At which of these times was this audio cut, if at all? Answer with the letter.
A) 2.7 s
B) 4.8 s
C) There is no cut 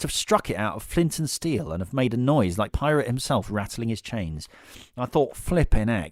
A